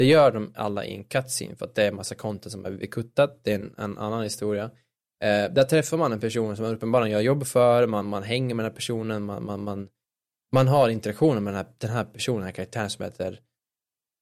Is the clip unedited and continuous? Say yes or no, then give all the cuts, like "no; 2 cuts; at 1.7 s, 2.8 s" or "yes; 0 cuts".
yes; 0 cuts